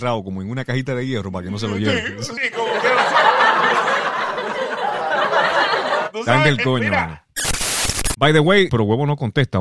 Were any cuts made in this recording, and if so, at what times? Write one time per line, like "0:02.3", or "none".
0:02.4
0:08.7